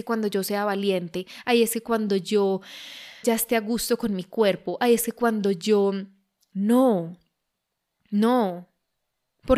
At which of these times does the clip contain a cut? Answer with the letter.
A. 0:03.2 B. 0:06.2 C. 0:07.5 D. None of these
A